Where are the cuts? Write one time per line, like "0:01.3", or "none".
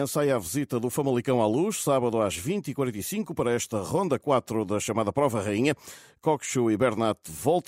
none